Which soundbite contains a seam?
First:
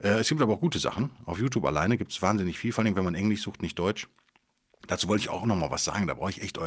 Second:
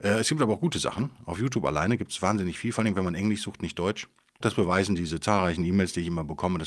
second; 1 cut; at 4.4 s

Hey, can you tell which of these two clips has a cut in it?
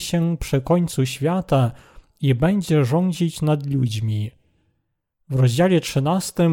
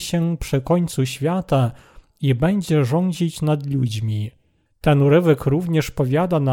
second; 1 cut; at 4.7 s

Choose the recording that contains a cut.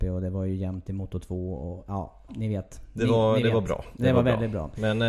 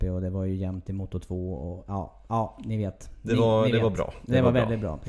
first; 1 cut; at 2.3 s

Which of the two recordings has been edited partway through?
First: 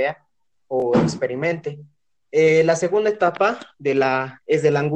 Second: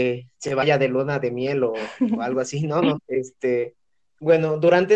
second; 1 cut; at 3.0 s

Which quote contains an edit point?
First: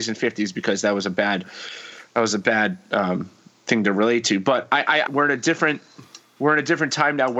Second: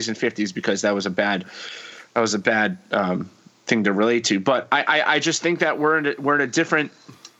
first; 1 cut; at 5.1 s

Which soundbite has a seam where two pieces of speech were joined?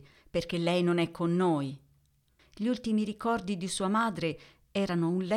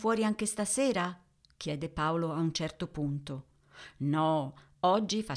first; 1 cut; at 2.4 s

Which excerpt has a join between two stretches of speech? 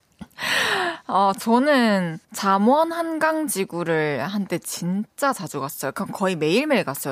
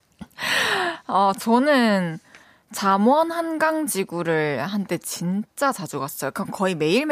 first; 1 cut; at 2.2 s

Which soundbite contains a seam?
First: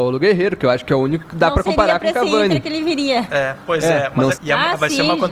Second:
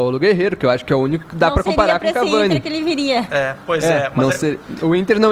first; 1 cut; at 4.3 s

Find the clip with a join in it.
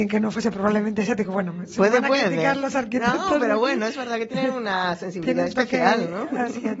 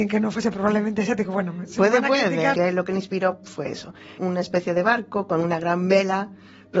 second; 2 cuts; at 2.5 s, 4.2 s

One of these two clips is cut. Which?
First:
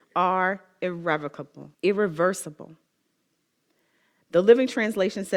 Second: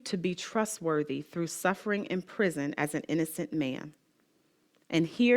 first; 1 cut; at 1.7 s

